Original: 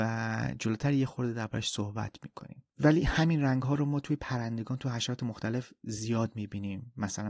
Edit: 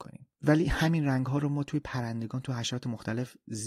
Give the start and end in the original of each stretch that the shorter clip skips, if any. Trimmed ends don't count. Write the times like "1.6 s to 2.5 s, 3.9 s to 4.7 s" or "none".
none